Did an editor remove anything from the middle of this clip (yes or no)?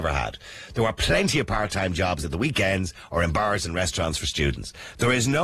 no